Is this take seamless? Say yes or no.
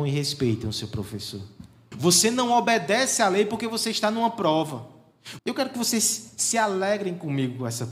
no